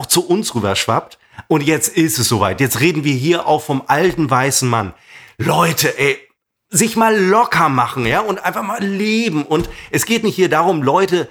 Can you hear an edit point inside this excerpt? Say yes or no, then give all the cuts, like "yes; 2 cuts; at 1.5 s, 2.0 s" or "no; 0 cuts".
no; 0 cuts